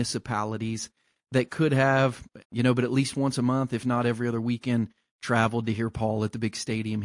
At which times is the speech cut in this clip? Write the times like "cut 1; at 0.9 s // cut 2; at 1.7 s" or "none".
cut 1; at 2.4 s

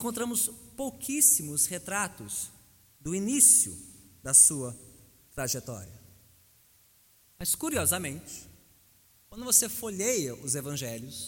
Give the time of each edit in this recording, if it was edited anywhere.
cut 1; at 7.3 s

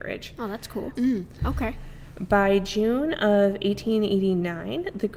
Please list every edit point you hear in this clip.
cut 1; at 1.0 s

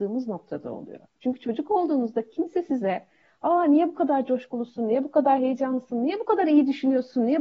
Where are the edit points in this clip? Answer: none

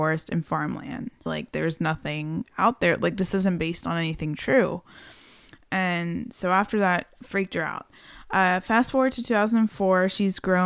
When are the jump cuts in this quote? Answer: cut 1; at 1.3 s

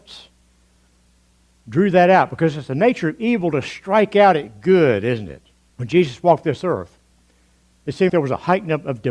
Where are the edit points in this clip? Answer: cut 1; at 5.7 s // cut 2; at 8.1 s

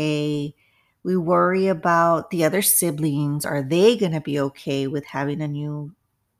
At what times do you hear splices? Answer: none

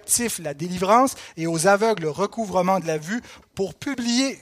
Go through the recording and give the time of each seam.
cut 1; at 3.4 s

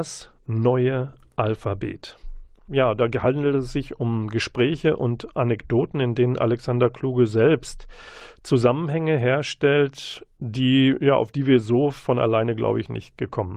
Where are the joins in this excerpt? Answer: cut 1; at 2.7 s

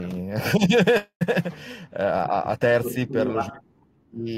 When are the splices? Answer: none

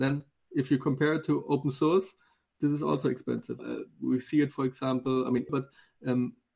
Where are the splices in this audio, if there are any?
cut 1; at 3.6 s // cut 2; at 5.5 s

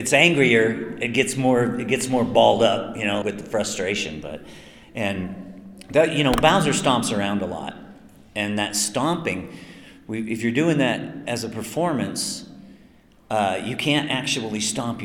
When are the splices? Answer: cut 1; at 3.2 s

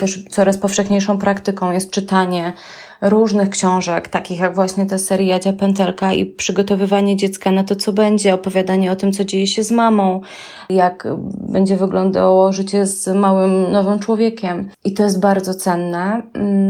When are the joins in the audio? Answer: none

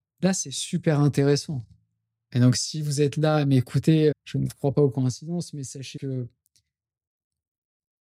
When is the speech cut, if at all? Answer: cut 1; at 4.1 s // cut 2; at 6.0 s

